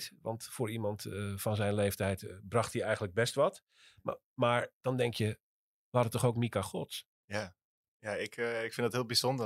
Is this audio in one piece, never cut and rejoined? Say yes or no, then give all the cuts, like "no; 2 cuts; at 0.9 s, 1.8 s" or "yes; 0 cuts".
yes; 0 cuts